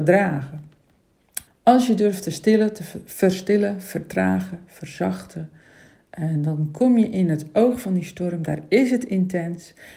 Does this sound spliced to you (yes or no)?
yes